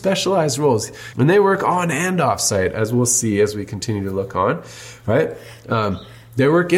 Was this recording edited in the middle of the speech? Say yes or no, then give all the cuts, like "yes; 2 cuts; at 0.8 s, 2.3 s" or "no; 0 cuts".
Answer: yes; 1 cut; at 1.1 s